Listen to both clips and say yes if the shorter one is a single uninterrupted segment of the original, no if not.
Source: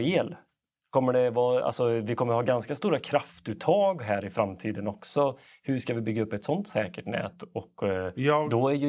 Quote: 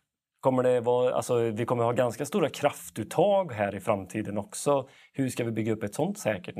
yes